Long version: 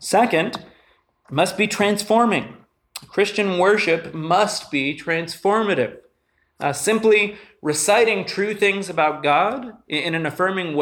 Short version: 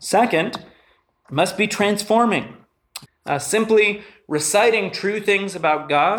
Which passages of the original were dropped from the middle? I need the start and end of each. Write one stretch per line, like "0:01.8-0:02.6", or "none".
0:03.1-0:06.4